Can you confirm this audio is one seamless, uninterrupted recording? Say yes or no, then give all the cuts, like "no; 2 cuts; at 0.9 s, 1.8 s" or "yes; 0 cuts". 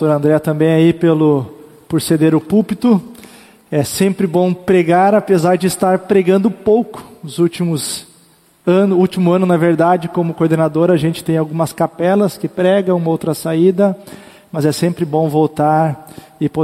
yes; 0 cuts